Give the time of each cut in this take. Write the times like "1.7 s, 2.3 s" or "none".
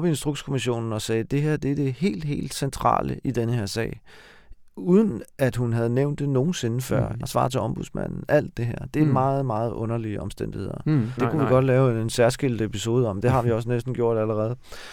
7.2 s, 11.2 s